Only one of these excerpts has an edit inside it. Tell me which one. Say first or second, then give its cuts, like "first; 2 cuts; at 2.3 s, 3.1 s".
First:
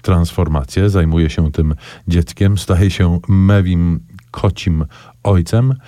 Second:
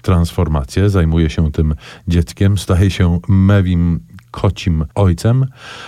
second; 1 cut; at 4.9 s